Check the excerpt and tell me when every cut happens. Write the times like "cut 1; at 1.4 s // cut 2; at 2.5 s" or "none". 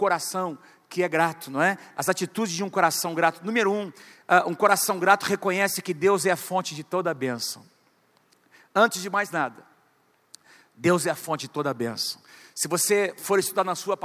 none